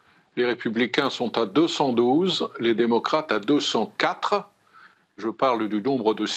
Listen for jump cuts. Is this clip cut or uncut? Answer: uncut